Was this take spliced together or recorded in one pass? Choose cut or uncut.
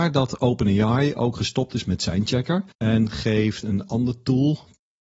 cut